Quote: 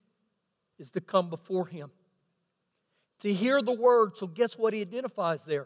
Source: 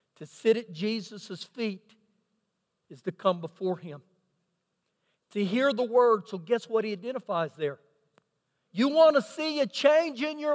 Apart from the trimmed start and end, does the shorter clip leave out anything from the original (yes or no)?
no